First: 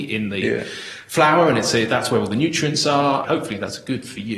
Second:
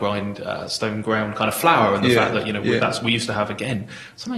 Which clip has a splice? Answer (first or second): first